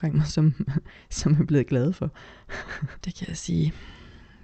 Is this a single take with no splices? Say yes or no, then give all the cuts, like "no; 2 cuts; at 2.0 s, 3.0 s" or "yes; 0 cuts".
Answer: no; 1 cut; at 3.0 s